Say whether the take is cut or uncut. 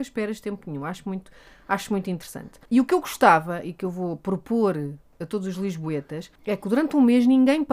cut